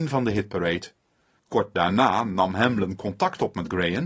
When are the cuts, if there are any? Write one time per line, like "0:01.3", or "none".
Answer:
0:01.4